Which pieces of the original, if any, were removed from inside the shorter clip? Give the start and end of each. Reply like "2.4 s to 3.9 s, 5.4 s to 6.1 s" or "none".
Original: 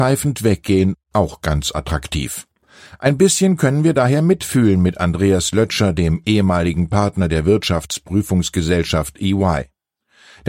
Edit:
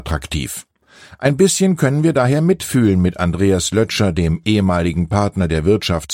none